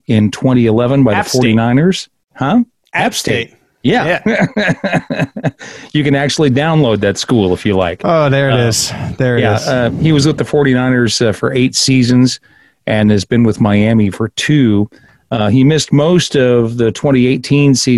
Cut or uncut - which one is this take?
uncut